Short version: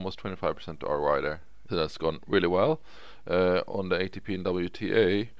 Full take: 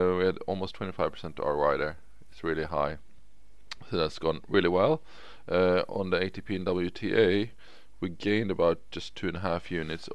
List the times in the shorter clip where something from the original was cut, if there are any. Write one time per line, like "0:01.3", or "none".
0:01.7